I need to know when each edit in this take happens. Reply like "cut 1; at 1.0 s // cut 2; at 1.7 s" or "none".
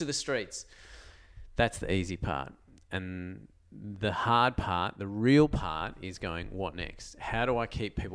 none